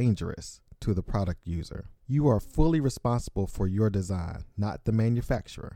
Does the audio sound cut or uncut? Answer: cut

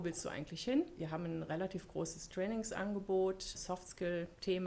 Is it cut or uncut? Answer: uncut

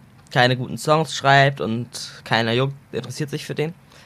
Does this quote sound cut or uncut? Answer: uncut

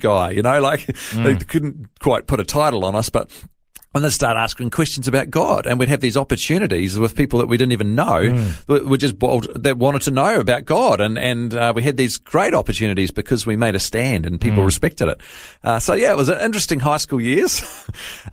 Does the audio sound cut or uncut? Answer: uncut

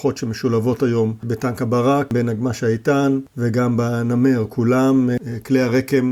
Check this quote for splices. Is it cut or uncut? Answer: uncut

